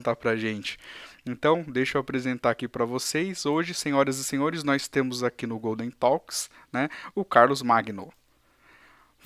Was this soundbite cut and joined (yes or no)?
no